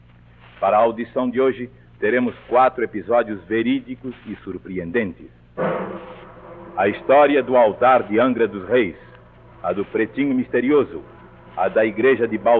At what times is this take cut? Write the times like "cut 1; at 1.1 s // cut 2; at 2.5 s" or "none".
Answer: none